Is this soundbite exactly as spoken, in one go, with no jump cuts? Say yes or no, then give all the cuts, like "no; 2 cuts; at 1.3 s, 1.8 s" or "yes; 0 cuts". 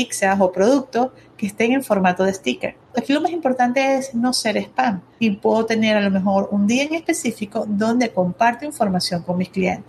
no; 1 cut; at 2.9 s